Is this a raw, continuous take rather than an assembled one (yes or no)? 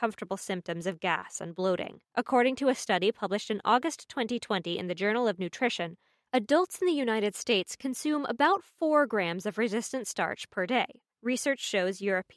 no